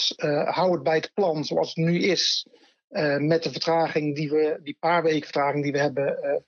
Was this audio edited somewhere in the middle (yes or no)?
no